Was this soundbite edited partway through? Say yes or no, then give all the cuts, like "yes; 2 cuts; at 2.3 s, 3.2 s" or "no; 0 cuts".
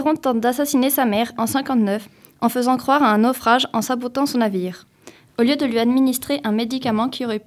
yes; 2 cuts; at 1.3 s, 5.3 s